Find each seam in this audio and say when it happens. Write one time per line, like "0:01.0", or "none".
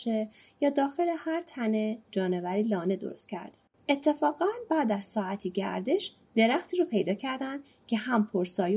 0:03.8